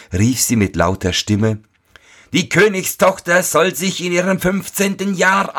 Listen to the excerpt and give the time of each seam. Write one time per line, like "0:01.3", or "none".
none